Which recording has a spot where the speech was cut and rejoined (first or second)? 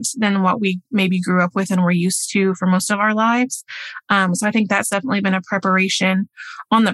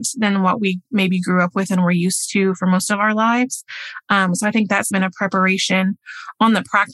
second